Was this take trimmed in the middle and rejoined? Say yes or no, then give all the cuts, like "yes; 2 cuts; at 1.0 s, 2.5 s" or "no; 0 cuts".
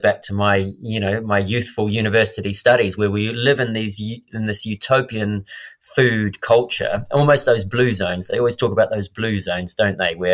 no; 0 cuts